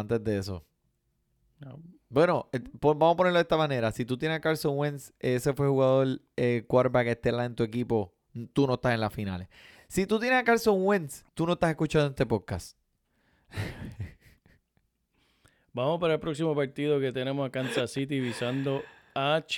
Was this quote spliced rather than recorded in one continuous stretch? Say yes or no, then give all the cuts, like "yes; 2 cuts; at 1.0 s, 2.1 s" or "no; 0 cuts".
yes; 1 cut; at 11.3 s